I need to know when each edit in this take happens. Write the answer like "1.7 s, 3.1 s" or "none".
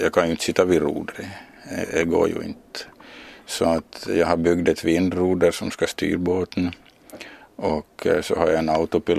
none